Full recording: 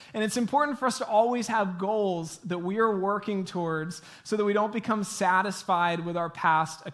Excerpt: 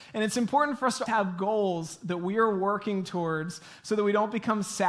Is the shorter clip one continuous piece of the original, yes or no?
no